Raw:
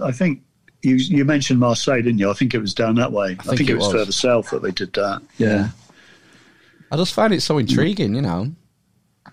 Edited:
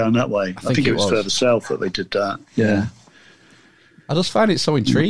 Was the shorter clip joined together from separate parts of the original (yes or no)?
no